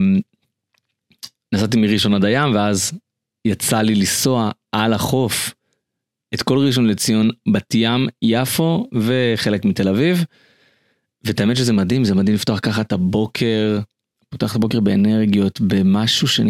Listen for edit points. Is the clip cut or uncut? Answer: uncut